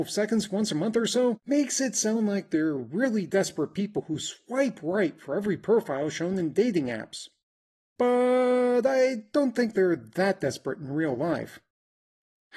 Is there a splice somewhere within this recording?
no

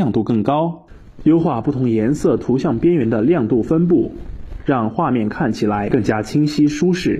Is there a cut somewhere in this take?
no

